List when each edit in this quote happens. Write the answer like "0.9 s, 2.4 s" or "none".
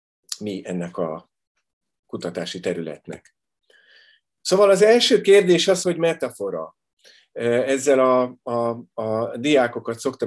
5.8 s